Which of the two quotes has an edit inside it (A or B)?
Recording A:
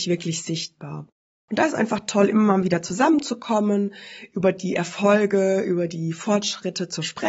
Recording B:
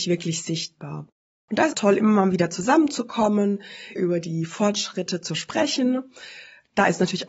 B